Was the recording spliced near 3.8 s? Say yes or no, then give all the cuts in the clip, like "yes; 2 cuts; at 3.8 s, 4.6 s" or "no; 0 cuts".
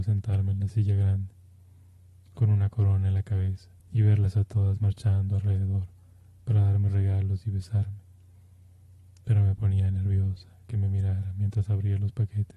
yes; 1 cut; at 3.8 s